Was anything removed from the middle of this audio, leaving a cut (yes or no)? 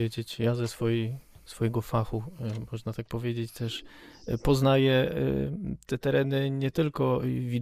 no